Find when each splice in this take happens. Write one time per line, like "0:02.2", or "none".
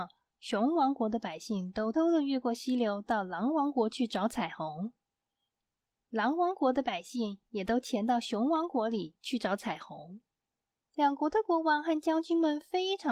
0:01.9